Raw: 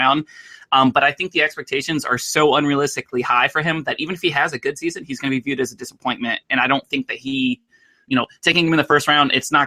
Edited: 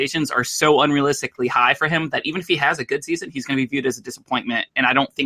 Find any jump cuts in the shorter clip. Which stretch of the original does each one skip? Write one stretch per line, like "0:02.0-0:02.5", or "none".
none